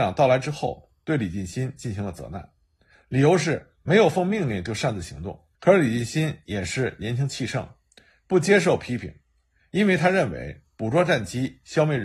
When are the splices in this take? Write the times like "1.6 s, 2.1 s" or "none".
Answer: 5.5 s